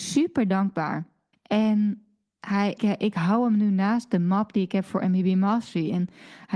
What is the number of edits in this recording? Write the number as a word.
two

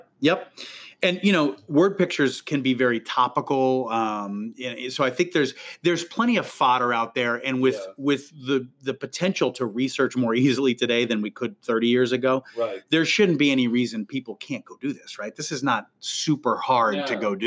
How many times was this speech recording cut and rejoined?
zero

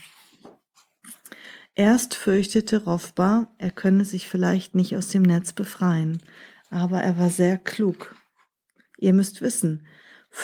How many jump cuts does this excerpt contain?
zero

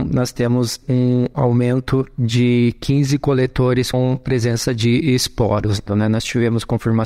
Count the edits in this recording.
two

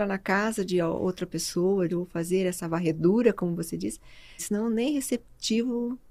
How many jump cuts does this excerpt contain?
two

